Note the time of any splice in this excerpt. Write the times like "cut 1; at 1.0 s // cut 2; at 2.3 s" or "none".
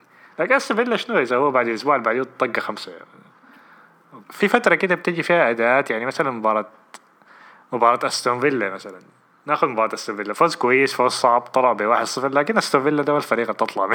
cut 1; at 4.2 s